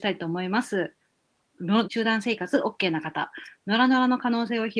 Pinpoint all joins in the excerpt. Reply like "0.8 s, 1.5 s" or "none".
1.8 s